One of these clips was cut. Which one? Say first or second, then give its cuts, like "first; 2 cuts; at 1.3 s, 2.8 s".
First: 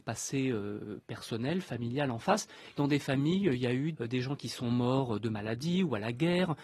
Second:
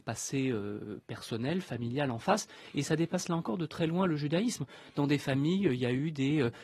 first; 2 cuts; at 2.7 s, 3.9 s